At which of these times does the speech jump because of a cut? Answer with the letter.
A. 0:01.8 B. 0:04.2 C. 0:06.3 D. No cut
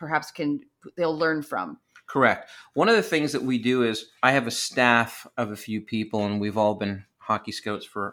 B